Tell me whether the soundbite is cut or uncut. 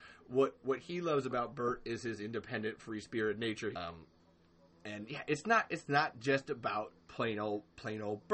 cut